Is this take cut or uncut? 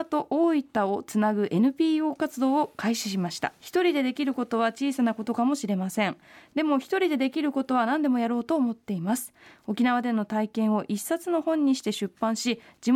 cut